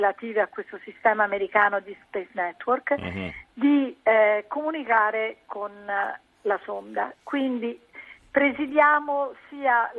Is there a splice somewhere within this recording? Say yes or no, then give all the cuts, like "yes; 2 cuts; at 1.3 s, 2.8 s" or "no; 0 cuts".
no; 0 cuts